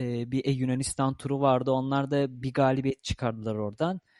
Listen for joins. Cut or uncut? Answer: uncut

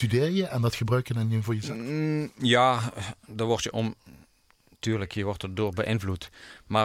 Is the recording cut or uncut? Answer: uncut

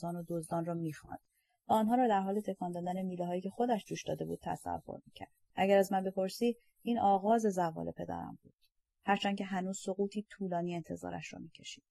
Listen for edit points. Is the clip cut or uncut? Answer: cut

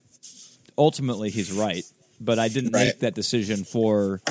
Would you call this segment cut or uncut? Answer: uncut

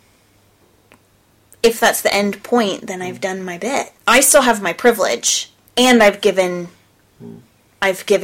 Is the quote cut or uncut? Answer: cut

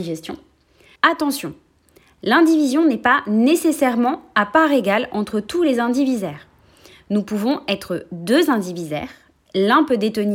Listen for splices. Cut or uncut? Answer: cut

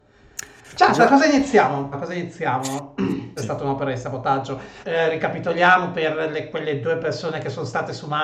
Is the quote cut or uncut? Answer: cut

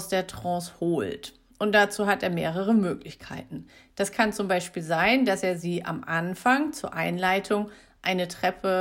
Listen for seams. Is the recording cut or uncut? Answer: uncut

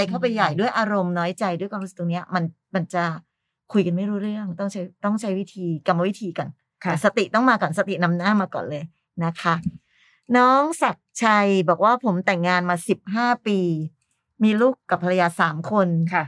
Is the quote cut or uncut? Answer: uncut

